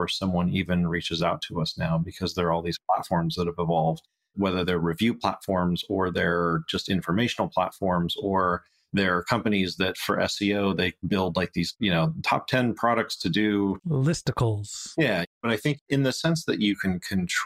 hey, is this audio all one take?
no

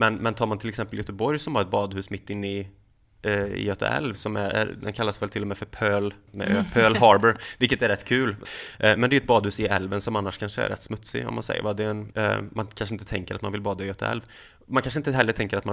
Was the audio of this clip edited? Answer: yes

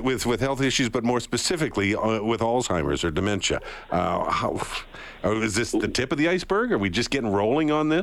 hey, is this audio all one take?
yes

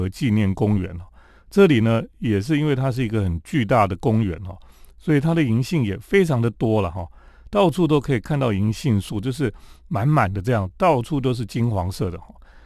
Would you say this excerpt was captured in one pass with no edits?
yes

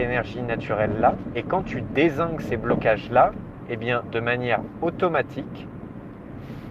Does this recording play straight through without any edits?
yes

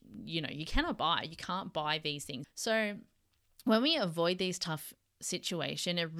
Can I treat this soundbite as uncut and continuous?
no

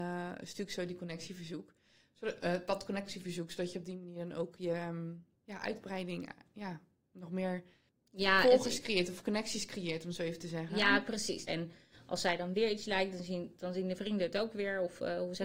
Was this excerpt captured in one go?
no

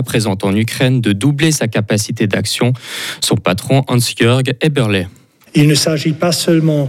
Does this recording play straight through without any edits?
no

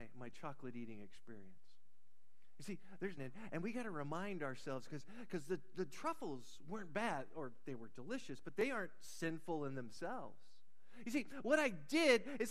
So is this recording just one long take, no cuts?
no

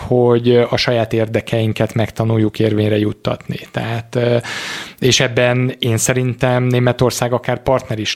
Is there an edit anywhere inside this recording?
no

